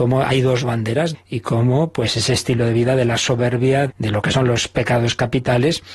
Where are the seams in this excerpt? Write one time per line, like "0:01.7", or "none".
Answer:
0:01.1
0:03.9